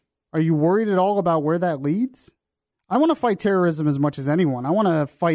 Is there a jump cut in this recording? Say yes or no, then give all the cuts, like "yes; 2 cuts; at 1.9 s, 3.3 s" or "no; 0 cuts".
yes; 1 cut; at 2.7 s